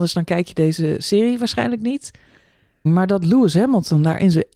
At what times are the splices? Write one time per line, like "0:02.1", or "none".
0:02.9